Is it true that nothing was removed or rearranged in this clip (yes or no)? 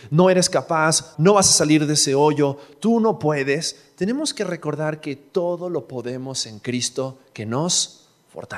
no